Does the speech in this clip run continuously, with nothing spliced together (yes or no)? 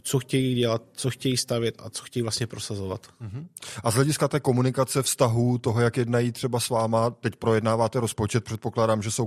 yes